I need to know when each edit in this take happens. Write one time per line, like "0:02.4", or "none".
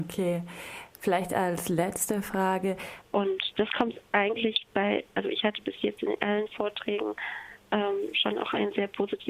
0:03.0